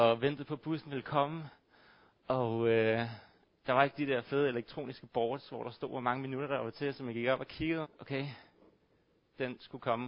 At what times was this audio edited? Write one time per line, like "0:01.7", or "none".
0:07.8

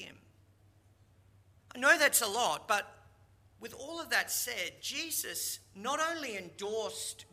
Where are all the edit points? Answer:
0:01.6

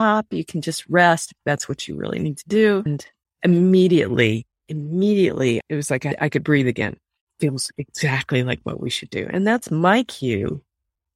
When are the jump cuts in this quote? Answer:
none

